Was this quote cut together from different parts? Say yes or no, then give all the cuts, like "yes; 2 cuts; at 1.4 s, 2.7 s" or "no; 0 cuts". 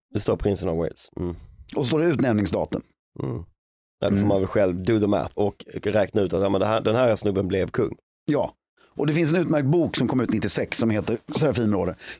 yes; 1 cut; at 5.3 s